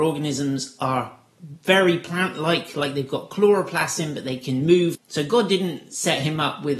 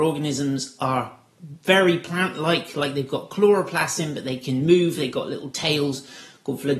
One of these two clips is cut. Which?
first; 1 cut; at 4.9 s

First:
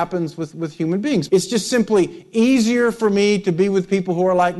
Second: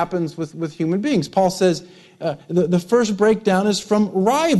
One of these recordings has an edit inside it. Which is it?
first; 1 cut; at 1.3 s

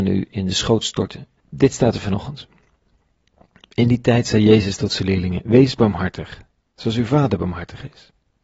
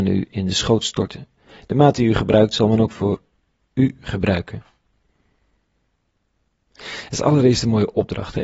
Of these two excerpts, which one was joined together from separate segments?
first; 1 cut; at 1.4 s

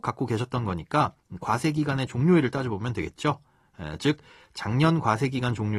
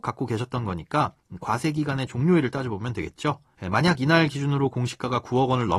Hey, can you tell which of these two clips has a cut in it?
second; 1 cut; at 3.5 s

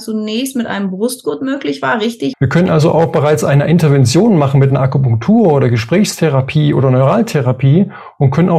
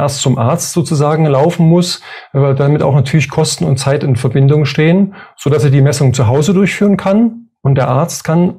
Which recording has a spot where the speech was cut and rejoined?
first; 1 cut; at 2.3 s

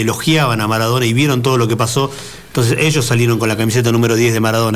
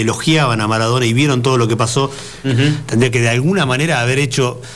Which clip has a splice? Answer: second; 1 cut; at 2.4 s

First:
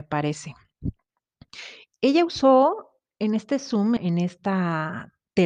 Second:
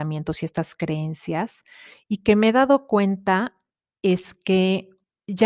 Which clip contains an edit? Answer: first; 2 cuts; at 1.9 s, 4.0 s

